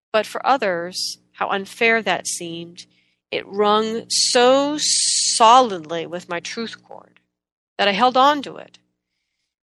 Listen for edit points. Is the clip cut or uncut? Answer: uncut